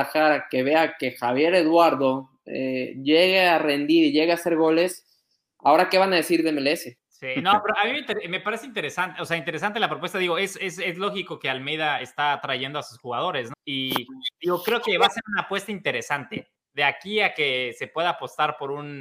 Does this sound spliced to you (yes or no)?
yes